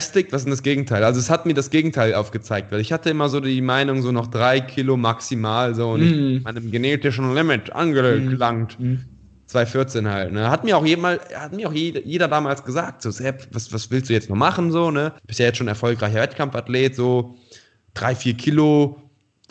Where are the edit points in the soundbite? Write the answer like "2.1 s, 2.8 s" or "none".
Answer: 15.2 s